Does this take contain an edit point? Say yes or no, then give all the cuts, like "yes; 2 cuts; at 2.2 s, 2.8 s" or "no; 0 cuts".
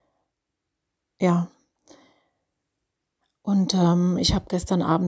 no; 0 cuts